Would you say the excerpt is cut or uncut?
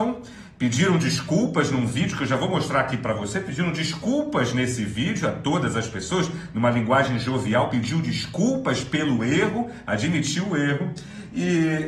uncut